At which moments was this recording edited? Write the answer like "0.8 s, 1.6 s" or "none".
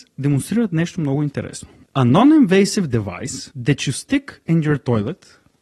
1.8 s